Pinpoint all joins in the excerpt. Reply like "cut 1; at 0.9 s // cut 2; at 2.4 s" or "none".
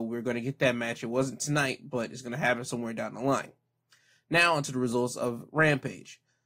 none